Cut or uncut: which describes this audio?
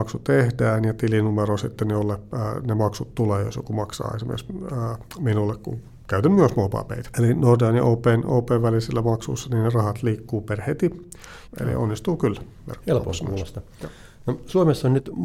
cut